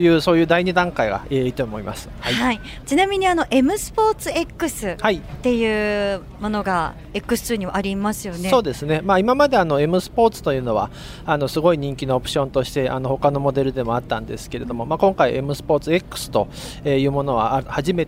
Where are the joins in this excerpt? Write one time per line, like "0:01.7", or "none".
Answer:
none